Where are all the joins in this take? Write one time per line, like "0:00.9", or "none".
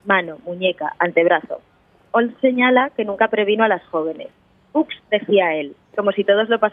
none

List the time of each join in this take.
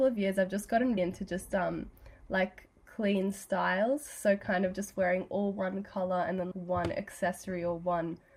0:01.0
0:06.5

